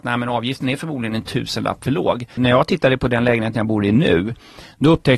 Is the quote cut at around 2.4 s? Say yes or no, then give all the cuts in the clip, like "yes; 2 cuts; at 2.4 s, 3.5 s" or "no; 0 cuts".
yes; 1 cut; at 2.4 s